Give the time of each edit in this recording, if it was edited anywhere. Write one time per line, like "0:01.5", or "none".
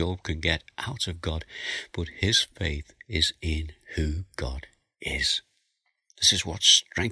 0:06.1